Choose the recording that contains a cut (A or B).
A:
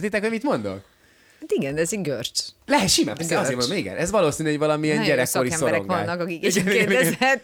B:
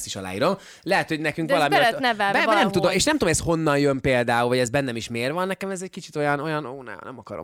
A